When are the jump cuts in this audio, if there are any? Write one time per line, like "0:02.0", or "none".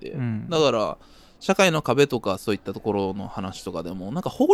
none

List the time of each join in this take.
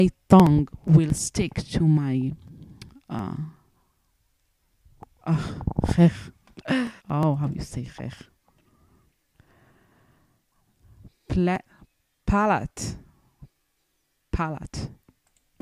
0:07.0

